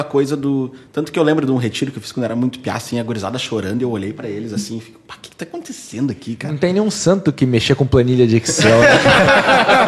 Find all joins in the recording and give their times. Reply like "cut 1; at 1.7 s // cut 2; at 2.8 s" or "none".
none